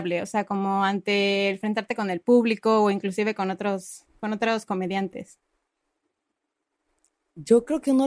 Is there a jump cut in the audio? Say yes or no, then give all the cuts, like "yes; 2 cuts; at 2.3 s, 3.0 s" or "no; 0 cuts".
no; 0 cuts